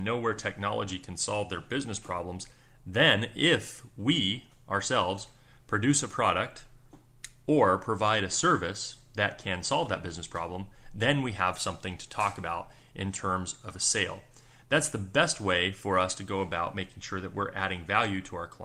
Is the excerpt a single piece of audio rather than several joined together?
yes; 0 cuts

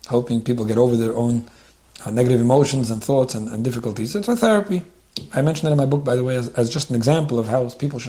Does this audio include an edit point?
no; 0 cuts

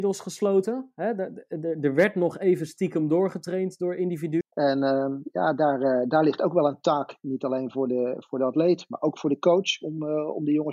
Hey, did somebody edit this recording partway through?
yes; 1 cut; at 4.4 s

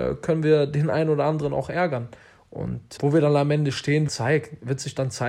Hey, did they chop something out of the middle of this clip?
yes; 2 cuts; at 3.0 s, 4.1 s

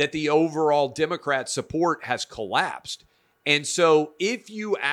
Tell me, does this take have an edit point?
no; 0 cuts

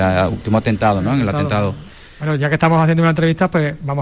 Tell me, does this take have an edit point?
no; 0 cuts

